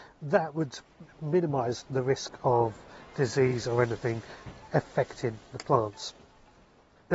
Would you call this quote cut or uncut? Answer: uncut